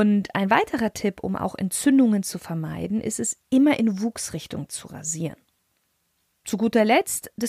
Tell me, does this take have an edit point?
no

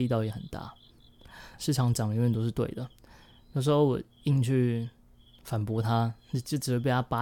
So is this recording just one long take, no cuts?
no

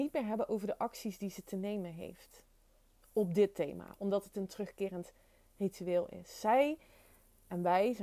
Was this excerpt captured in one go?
no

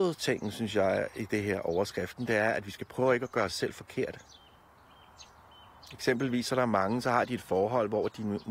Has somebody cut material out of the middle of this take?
no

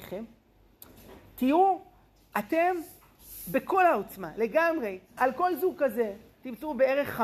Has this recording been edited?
yes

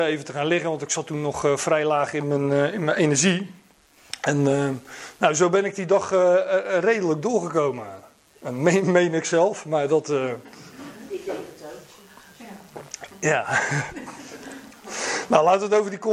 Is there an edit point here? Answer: no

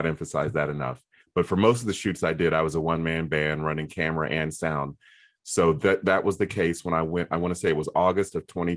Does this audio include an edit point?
yes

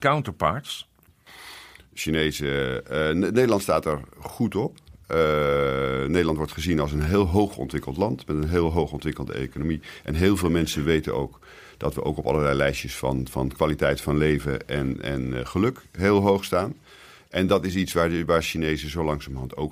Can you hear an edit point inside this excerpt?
no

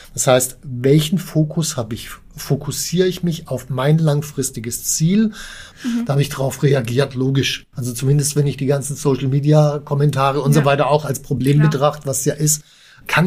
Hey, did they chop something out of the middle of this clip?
yes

